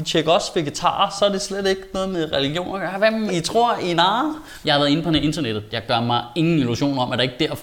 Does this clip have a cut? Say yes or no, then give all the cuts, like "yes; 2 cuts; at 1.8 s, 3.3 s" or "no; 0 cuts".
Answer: yes; 3 cuts; at 3.3 s, 4.6 s, 5.7 s